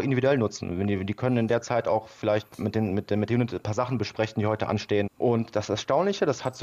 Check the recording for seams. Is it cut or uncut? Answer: cut